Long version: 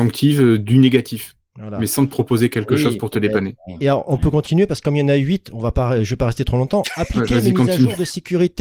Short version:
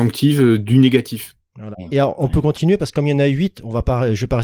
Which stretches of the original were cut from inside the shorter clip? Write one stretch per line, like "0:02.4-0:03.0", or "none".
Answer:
0:01.7-0:03.6